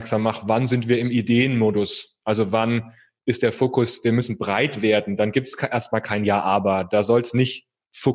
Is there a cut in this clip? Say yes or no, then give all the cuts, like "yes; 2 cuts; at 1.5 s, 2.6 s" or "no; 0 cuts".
no; 0 cuts